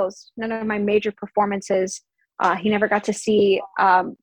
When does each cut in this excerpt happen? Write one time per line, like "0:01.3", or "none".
none